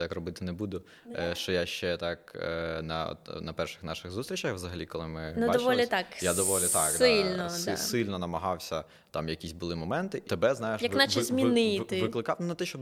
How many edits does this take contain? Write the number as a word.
one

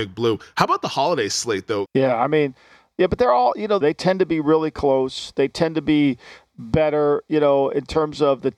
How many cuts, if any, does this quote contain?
two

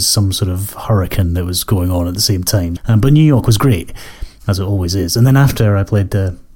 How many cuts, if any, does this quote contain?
one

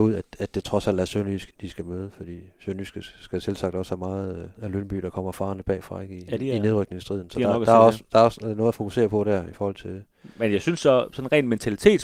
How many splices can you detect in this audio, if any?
two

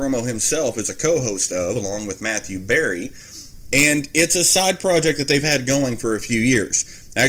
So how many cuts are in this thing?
zero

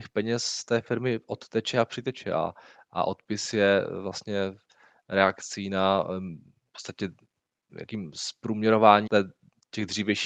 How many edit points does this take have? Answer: two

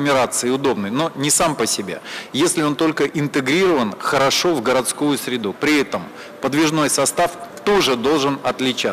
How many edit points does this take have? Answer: one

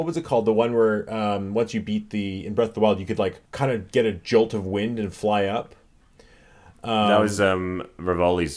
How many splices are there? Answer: one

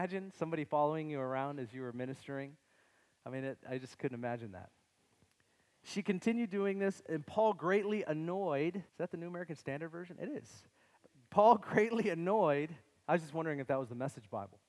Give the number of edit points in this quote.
one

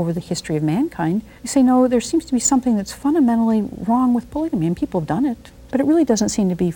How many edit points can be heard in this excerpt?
two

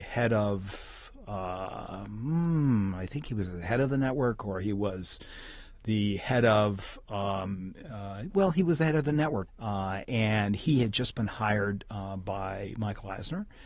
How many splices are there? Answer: one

